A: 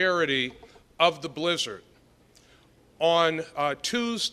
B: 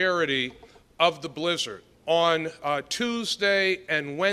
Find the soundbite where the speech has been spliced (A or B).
B